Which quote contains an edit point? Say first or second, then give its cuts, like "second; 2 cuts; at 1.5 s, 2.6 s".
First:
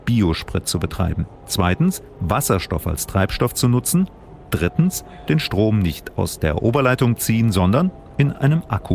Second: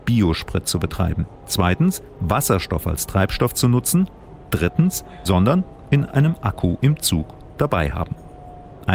second; 1 cut; at 5.2 s